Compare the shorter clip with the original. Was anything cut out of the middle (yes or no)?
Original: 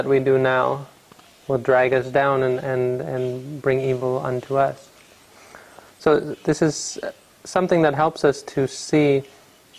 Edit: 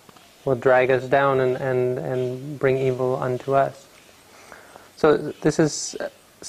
no